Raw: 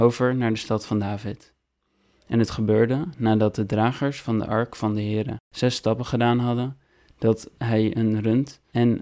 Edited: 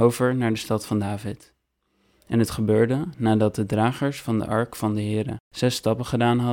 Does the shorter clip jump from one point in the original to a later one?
no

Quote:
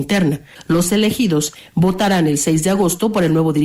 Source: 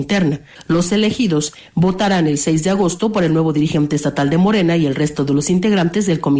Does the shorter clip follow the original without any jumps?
yes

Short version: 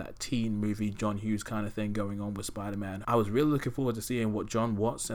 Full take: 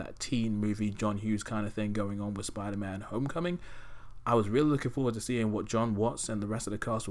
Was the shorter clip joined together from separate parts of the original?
yes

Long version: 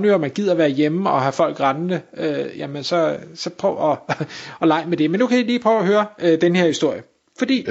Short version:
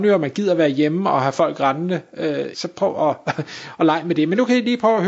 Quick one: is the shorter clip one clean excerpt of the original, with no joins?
no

